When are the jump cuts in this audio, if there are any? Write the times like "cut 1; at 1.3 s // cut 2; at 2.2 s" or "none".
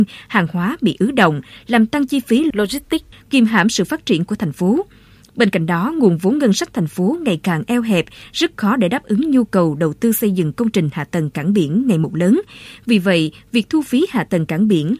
none

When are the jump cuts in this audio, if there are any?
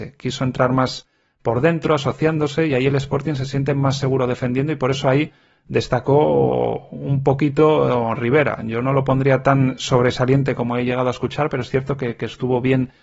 none

